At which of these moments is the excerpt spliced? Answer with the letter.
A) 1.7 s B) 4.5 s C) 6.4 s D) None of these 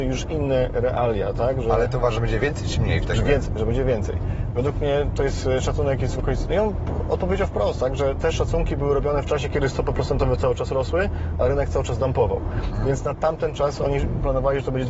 C